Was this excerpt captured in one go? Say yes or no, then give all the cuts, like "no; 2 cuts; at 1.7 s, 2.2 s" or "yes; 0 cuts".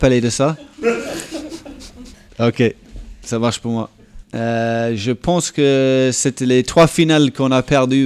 no; 2 cuts; at 2.3 s, 4.2 s